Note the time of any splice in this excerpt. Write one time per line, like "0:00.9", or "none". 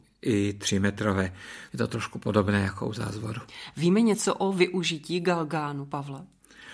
0:01.7

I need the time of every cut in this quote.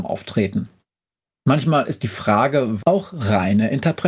0:02.8

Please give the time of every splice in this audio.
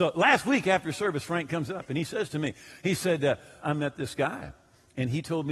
0:03.6

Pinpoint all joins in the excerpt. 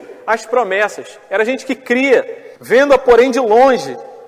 0:02.6

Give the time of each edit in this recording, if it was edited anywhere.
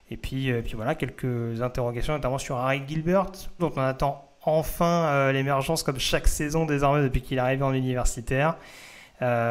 0:03.6

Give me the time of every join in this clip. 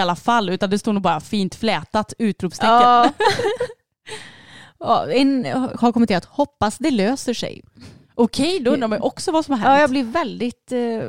none

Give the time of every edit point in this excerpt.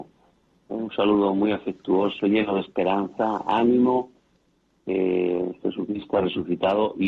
none

